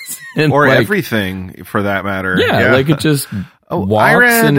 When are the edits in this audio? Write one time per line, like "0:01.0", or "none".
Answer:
none